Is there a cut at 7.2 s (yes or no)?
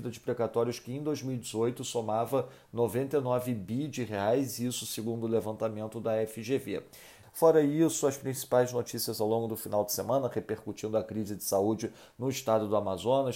yes